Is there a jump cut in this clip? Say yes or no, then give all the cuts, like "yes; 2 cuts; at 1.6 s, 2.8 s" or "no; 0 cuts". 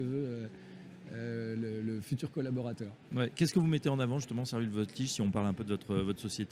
no; 0 cuts